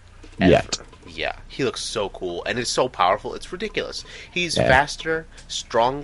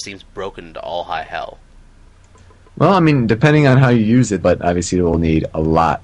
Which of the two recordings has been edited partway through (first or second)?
second